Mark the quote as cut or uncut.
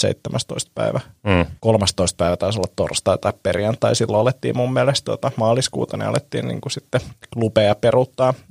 cut